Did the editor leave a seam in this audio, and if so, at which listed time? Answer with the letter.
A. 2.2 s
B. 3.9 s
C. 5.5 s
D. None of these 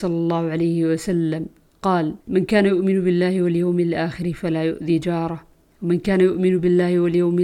A